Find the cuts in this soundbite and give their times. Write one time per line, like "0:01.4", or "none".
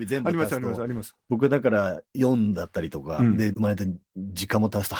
0:03.5